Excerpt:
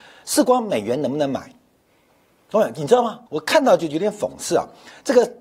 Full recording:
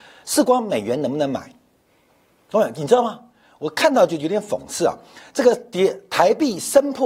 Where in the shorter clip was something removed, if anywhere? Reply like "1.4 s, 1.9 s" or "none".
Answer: 3.3 s